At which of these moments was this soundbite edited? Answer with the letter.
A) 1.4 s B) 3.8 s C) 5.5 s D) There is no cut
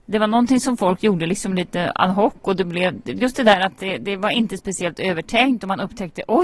D